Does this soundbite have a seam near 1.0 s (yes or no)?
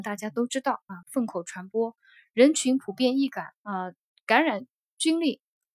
yes